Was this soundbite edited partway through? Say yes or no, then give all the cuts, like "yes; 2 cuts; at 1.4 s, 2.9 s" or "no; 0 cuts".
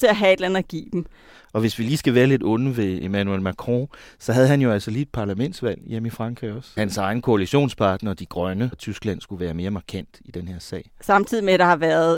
yes; 2 cuts; at 6.8 s, 8.7 s